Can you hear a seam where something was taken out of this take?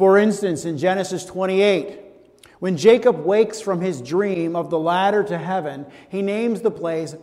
no; 0 cuts

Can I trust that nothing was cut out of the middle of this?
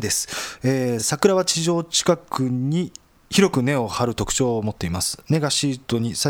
yes; 0 cuts

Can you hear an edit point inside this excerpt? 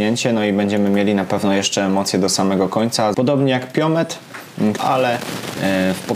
yes; 2 cuts; at 3.1 s, 4.8 s

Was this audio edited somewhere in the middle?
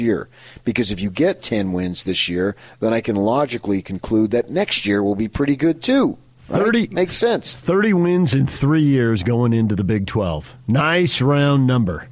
no; 0 cuts

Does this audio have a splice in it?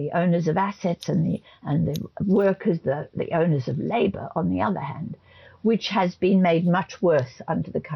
no; 0 cuts

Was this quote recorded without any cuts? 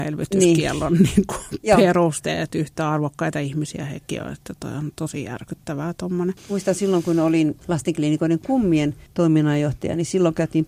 yes; 0 cuts

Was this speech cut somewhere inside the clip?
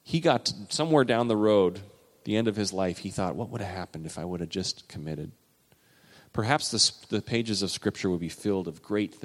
no; 0 cuts

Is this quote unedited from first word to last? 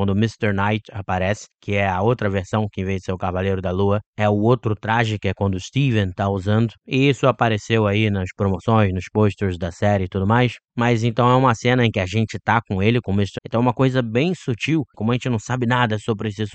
no; 2 cuts; at 13.4 s, 14.9 s

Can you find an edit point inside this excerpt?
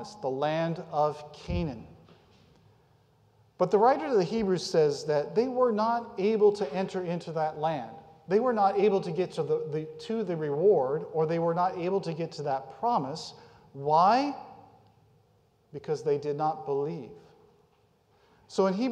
no; 0 cuts

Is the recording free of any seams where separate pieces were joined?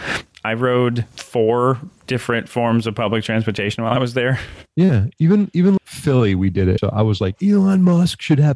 no; 2 cuts; at 5.8 s, 6.8 s

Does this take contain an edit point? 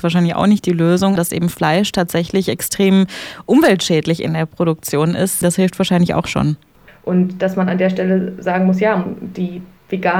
yes; 3 cuts; at 1.2 s, 5.4 s, 6.9 s

